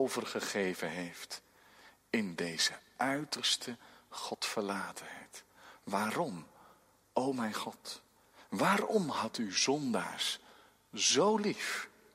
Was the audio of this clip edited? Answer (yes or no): yes